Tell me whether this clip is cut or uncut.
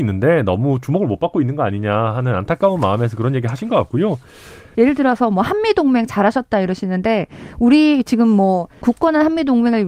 cut